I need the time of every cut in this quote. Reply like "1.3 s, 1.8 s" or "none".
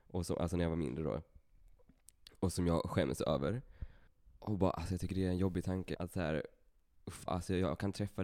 5.9 s, 7.3 s